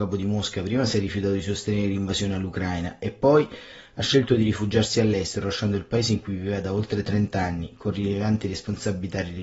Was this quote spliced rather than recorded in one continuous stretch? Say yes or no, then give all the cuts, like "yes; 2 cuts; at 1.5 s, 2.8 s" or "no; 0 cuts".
no; 0 cuts